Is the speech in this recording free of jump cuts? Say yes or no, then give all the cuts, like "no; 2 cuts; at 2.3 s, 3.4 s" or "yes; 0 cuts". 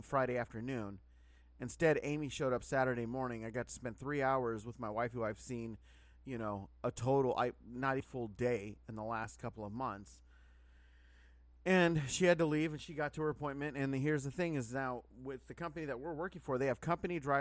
no; 1 cut; at 8.0 s